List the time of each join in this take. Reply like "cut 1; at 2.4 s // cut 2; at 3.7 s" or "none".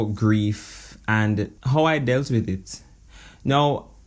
cut 1; at 1.6 s